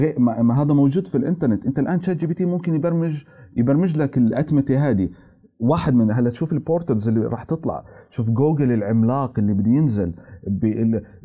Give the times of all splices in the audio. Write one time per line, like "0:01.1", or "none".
none